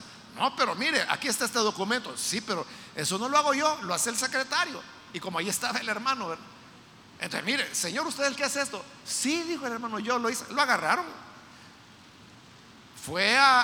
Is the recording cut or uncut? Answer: uncut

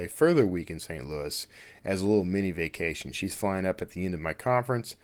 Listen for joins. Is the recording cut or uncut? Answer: uncut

